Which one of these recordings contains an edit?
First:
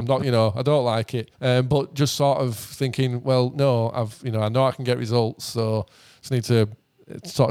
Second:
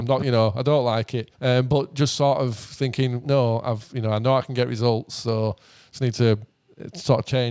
second; 1 cut; at 3.2 s

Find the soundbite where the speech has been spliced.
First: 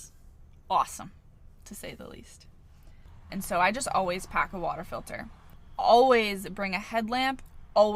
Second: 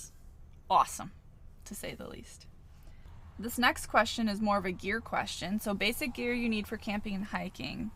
first; 1 cut; at 3.3 s

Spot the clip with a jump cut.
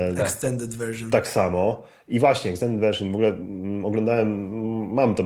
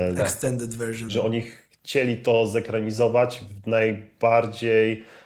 second; 1 cut; at 1.1 s

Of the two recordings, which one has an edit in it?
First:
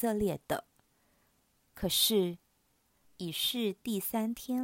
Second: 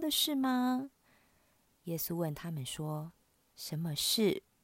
first; 1 cut; at 3.0 s

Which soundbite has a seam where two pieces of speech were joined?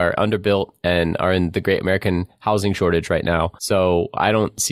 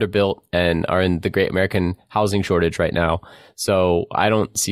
first; 1 cut; at 3.6 s

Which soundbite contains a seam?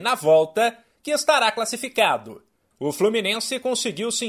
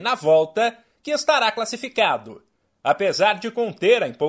first; 1 cut; at 2.7 s

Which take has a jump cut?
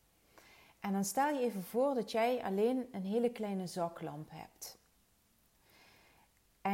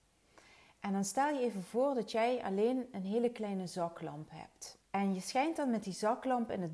second; 1 cut; at 4.8 s

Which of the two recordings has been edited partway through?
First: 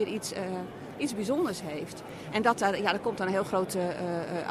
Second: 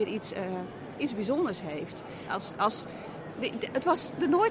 second; 1 cut; at 2.2 s

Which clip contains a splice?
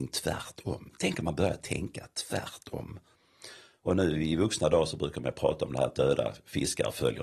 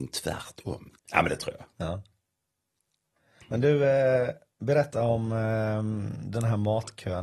second; 1 cut; at 0.9 s

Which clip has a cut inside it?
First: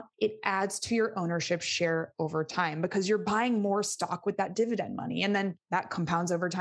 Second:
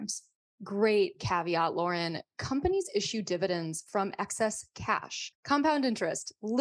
second; 1 cut; at 5.3 s

